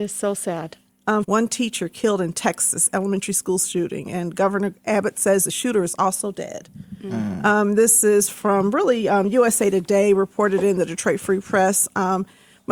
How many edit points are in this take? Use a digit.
1